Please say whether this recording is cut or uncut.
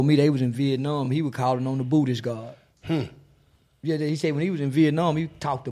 uncut